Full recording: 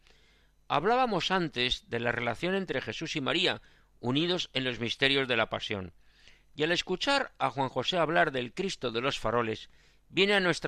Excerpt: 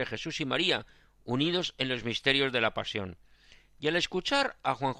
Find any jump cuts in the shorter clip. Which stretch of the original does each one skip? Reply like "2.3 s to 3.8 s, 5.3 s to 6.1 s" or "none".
none